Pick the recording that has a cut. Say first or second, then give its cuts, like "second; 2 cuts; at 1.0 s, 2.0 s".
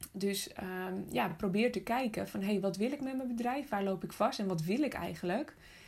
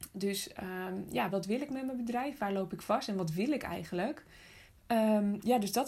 second; 2 cuts; at 1.3 s, 4.7 s